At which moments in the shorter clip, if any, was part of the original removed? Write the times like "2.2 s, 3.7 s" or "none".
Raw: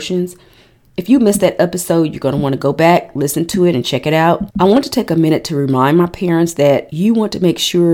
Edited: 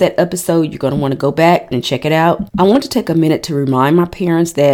1.7 s